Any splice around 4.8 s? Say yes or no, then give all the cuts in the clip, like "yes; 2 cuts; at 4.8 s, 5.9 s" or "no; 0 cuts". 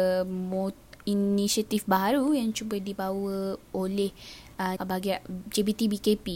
yes; 1 cut; at 4.8 s